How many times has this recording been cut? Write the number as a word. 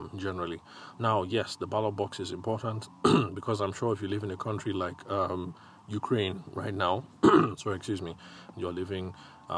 two